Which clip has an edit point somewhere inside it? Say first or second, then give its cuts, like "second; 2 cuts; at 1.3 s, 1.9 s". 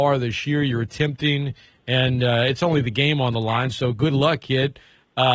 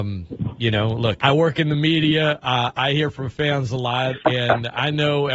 second; 1 cut; at 1.2 s